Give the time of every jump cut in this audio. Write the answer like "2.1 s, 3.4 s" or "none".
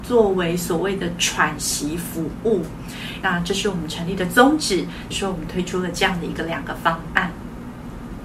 3.2 s, 5.1 s

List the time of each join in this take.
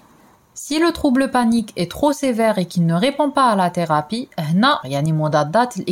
4.8 s

